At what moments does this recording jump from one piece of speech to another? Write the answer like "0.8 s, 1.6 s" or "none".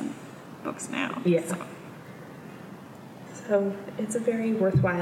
none